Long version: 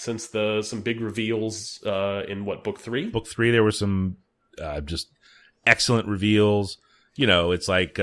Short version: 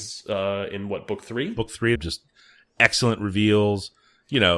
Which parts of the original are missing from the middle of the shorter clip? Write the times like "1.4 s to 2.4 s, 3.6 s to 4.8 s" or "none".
3.5 s to 4.8 s